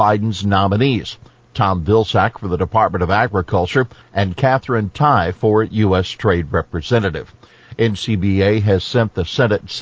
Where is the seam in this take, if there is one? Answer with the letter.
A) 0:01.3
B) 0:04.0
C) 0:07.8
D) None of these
B